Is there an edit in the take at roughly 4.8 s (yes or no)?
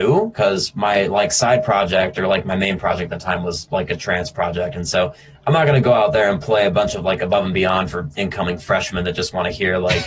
no